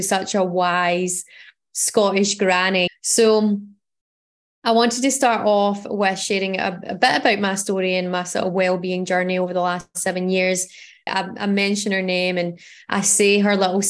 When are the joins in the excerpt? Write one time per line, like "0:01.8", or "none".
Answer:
0:02.9
0:11.1